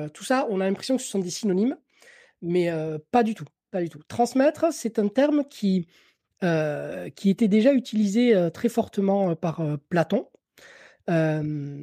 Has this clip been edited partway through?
no; 0 cuts

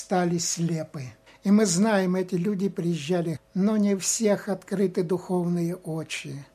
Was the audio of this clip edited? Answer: yes; 2 cuts; at 1.3 s, 3.4 s

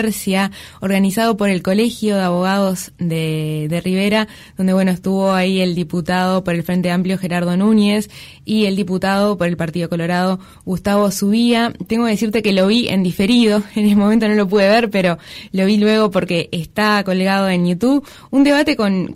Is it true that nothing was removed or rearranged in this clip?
yes; 0 cuts

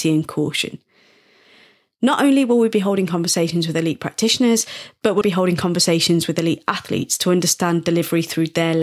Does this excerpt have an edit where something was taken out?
yes; 1 cut; at 5.2 s

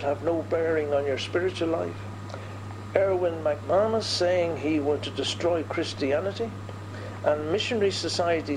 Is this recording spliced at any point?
yes; 1 cut; at 5.0 s

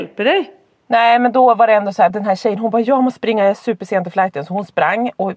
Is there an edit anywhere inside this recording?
yes; 1 cut; at 2.1 s

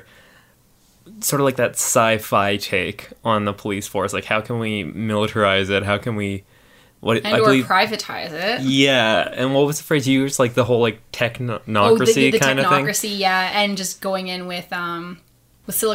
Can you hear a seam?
no; 0 cuts

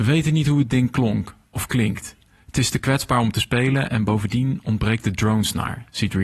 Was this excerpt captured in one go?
yes; 0 cuts

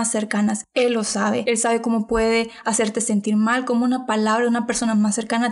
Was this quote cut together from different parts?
no; 0 cuts

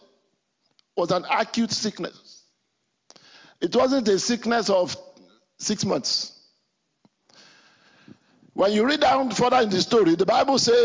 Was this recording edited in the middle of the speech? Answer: no; 0 cuts

